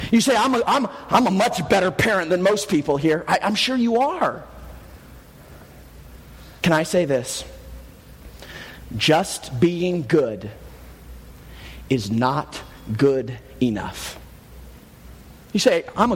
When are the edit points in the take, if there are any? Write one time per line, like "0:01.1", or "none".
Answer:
0:06.6